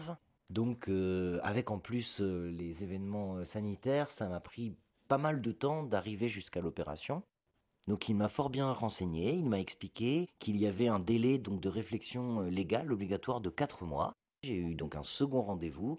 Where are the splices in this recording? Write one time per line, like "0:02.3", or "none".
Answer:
none

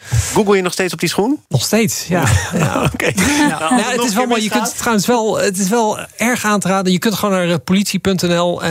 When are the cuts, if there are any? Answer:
0:01.4

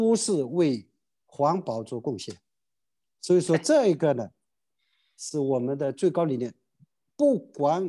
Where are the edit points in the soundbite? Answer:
none

